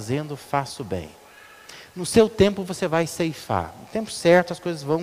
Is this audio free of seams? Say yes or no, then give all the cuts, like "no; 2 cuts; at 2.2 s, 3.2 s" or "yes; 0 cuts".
yes; 0 cuts